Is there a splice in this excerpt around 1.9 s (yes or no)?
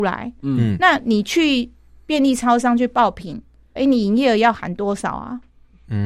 no